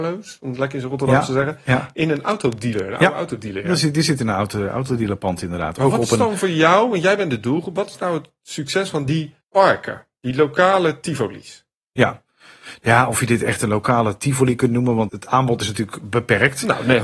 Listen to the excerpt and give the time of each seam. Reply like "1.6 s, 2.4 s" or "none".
9.4 s, 15.1 s